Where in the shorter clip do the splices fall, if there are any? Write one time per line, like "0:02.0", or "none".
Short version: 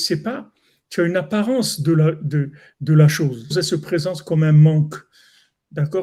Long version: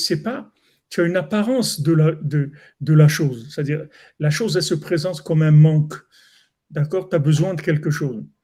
0:03.5